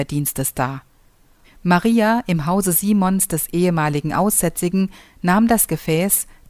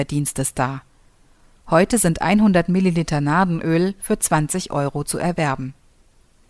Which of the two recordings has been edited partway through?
first; 1 cut; at 1.4 s

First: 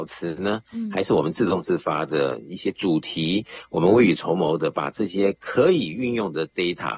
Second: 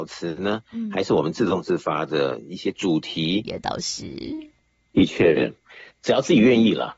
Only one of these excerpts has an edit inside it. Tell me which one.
second; 2 cuts; at 3.4 s, 5.9 s

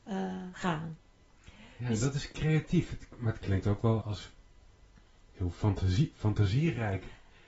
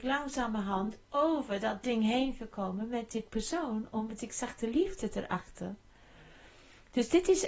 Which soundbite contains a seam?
first; 1 cut; at 4.0 s

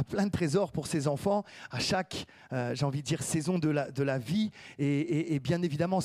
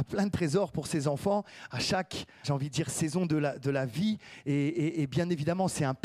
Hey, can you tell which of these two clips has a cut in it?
second; 1 cut; at 2.4 s

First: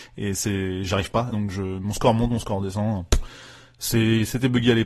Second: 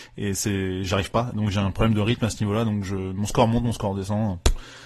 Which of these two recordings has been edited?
first; 1 cut; at 1.3 s

